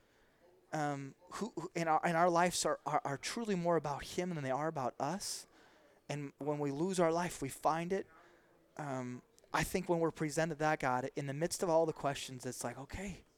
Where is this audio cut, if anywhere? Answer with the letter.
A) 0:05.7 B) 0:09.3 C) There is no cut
C